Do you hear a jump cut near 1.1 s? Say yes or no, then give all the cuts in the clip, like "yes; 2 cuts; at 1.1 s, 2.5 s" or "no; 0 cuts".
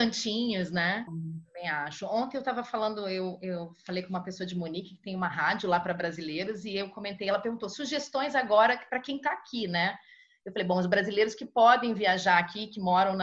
yes; 1 cut; at 1.1 s